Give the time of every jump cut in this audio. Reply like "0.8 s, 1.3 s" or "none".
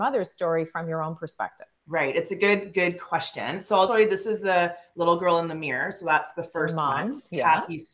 1.8 s, 3.9 s